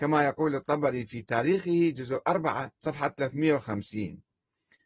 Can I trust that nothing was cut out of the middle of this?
no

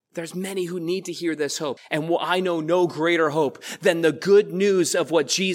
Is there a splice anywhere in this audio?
yes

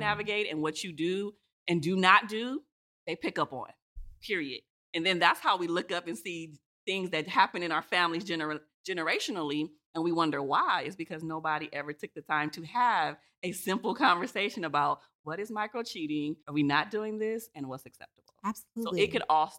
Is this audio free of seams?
no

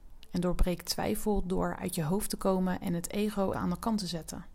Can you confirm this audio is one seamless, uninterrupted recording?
no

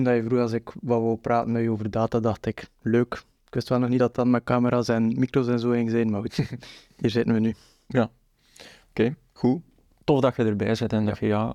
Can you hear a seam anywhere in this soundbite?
no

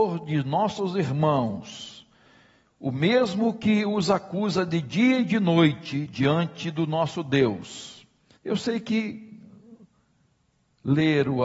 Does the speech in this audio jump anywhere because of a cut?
yes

